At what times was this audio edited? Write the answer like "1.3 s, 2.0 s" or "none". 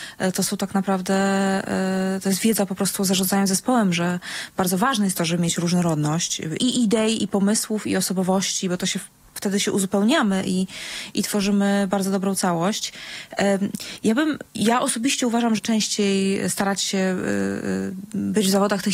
6.6 s, 14.5 s, 15.6 s